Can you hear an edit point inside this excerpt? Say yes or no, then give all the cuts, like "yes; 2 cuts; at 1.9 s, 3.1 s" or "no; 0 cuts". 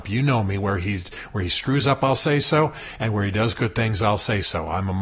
no; 0 cuts